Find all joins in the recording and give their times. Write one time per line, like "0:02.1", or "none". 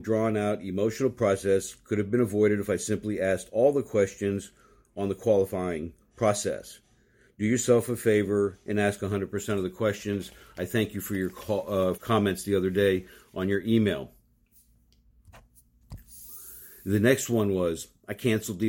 0:12.0